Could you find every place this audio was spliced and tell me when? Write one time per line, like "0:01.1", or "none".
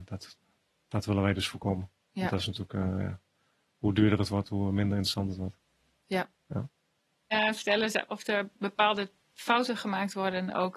none